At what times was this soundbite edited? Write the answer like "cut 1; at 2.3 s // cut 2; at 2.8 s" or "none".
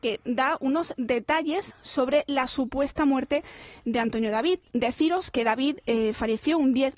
cut 1; at 4.7 s